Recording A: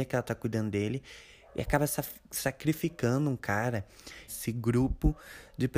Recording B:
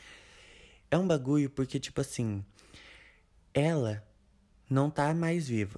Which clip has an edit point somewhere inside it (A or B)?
A